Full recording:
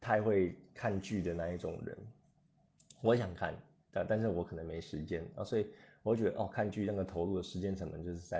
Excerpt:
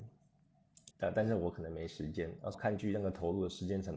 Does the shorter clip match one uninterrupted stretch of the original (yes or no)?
no